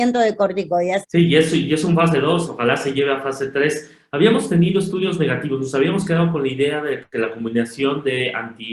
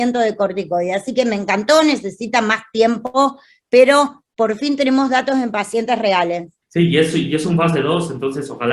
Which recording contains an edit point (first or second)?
first